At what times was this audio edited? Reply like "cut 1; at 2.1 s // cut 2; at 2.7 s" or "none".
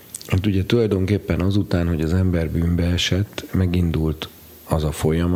none